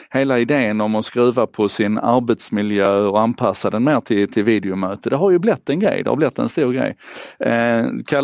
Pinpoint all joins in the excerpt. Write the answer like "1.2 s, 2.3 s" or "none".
none